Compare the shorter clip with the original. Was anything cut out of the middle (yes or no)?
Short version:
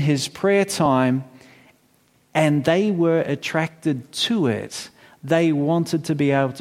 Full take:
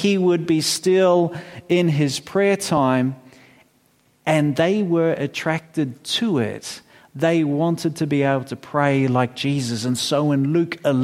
no